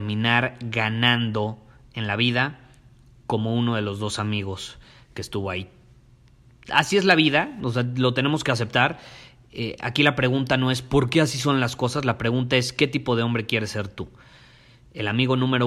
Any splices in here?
no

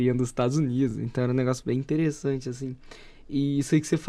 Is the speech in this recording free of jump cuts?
yes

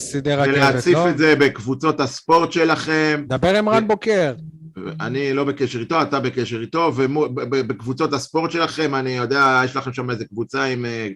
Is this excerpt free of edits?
yes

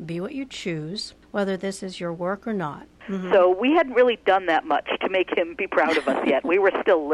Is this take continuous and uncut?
no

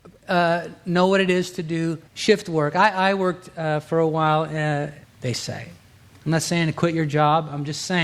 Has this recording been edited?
yes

